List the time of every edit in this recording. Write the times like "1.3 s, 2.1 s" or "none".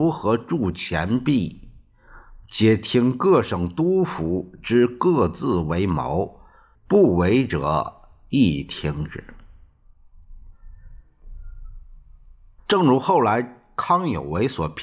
6.7 s, 12.6 s